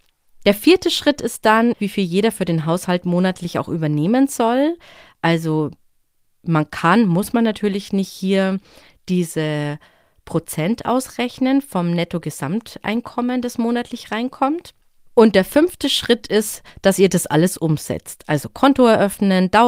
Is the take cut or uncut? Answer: cut